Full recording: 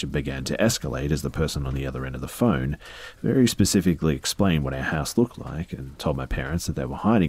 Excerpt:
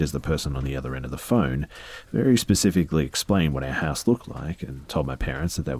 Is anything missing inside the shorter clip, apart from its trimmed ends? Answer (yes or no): no